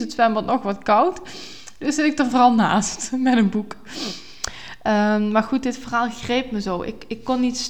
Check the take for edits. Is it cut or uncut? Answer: uncut